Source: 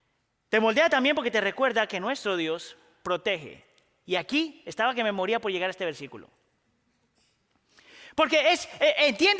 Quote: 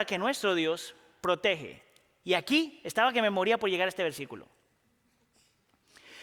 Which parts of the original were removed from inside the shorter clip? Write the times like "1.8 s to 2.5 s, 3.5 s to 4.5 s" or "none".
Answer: none